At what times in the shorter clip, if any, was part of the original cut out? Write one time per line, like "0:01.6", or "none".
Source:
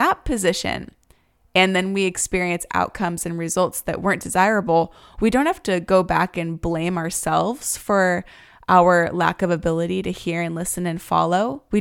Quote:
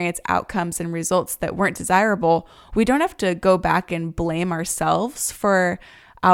none